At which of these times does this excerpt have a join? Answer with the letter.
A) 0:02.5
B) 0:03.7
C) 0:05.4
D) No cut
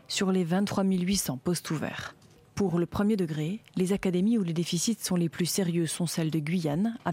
B